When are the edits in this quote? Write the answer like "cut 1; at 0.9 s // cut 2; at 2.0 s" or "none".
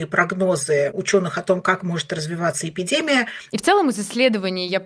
cut 1; at 3.5 s